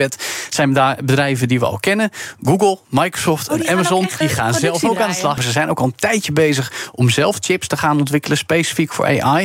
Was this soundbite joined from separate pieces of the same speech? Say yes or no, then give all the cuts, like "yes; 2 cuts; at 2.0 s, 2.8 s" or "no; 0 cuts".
yes; 2 cuts; at 4.2 s, 5.4 s